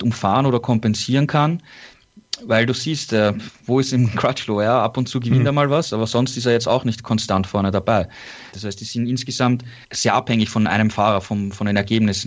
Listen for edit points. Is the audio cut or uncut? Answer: cut